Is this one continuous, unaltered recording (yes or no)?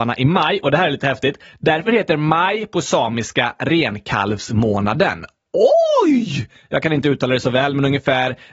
yes